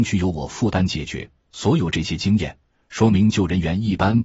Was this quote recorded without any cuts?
yes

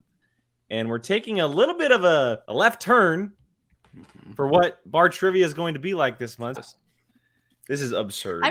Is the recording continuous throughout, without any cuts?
no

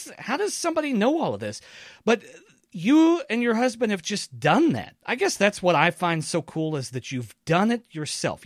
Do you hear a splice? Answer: no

